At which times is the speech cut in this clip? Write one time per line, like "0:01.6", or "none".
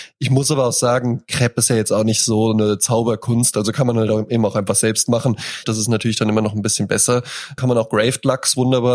0:05.6
0:07.6